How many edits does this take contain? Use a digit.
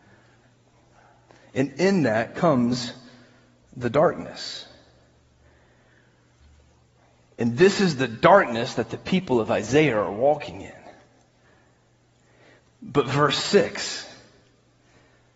0